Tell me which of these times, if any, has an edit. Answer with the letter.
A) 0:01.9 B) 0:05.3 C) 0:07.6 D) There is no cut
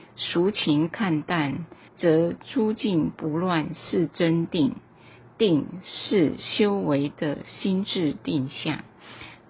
A